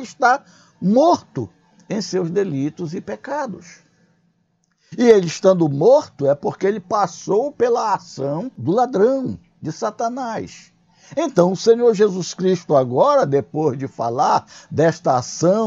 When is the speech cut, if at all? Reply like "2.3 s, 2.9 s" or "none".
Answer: none